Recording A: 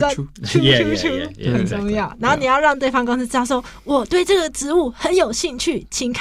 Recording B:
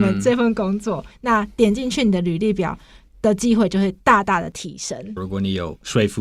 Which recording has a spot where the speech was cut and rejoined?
B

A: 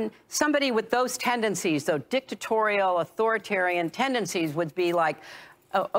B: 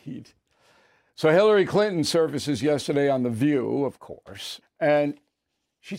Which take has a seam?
B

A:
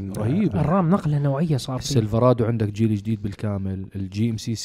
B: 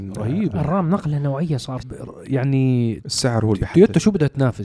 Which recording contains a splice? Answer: B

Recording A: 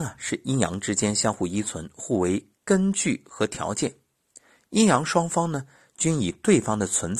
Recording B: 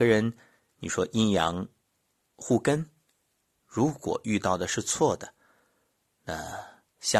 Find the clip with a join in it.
B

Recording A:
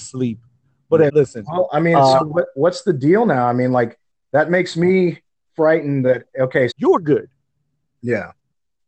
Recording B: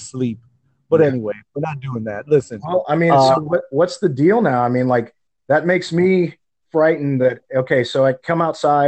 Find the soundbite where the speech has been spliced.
A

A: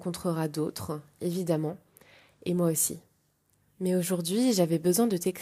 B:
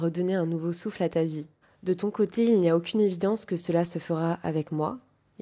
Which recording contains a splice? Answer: B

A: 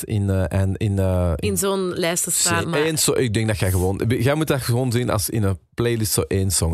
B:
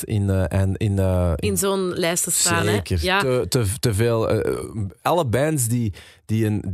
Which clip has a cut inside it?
A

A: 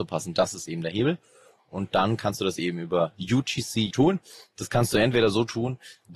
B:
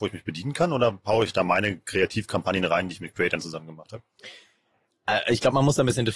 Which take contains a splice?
A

